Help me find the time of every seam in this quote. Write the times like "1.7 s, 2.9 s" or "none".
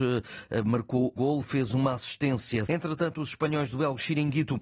1.2 s, 2.7 s